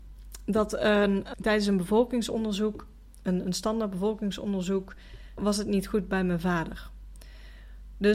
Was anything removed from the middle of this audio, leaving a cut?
yes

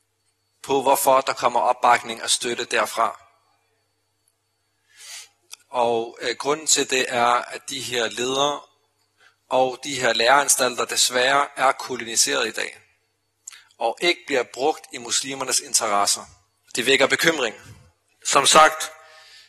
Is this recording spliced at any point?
yes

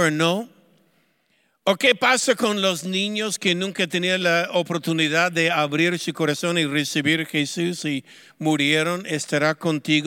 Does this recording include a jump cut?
no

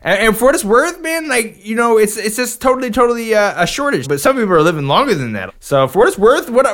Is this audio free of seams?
no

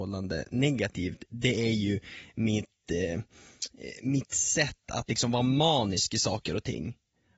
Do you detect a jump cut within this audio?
no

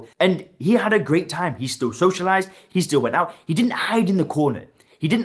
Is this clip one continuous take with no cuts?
yes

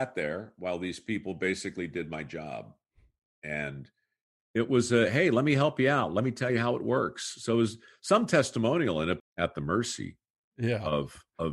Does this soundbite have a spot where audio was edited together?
yes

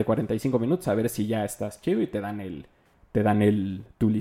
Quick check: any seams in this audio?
no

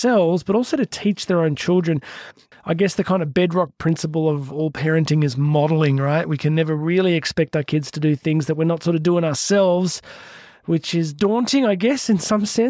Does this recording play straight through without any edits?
no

